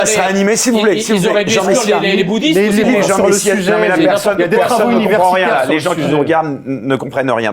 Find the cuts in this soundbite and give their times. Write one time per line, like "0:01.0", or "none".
0:02.8